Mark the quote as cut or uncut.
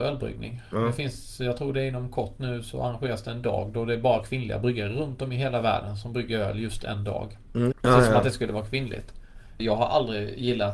cut